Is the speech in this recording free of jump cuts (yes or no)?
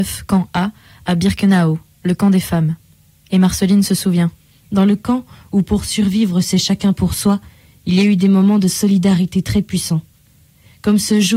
yes